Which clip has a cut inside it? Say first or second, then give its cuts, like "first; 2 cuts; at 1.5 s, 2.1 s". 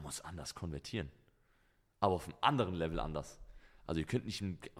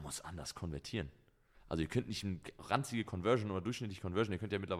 second; 1 cut; at 1.5 s